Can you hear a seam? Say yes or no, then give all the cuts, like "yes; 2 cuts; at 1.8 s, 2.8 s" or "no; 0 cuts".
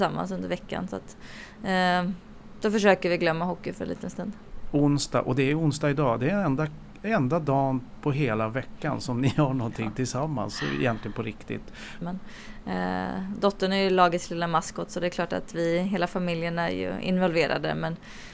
yes; 1 cut; at 12.0 s